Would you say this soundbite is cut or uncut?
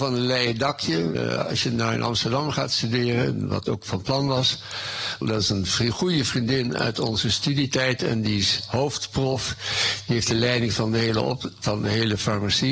cut